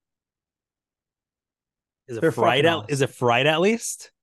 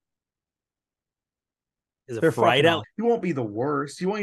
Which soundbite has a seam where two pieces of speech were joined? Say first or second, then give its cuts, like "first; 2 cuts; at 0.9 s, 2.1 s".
second; 1 cut; at 2.8 s